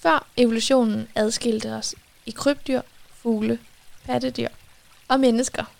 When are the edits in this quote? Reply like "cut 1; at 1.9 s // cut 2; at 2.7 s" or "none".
none